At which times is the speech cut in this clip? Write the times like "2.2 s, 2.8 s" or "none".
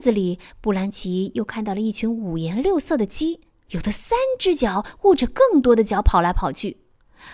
3.7 s